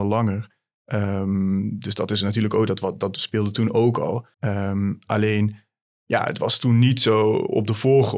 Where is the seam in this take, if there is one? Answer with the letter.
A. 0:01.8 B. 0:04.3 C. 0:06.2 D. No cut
B